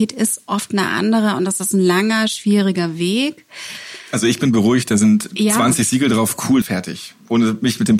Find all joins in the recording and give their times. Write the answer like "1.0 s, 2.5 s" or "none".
6.6 s